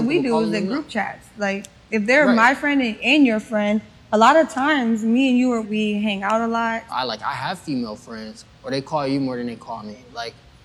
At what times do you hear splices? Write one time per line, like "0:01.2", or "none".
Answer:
0:05.6
0:06.9
0:08.5